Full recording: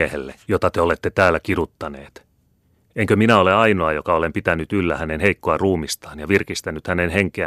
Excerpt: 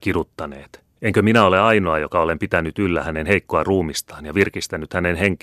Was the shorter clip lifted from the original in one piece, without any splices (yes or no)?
no